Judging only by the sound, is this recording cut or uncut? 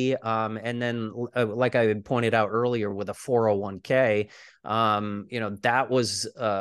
uncut